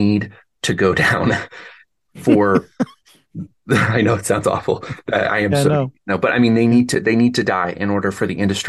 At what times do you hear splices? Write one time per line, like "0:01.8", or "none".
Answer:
none